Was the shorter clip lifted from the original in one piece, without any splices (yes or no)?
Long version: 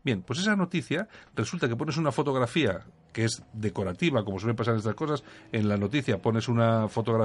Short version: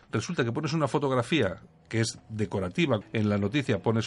no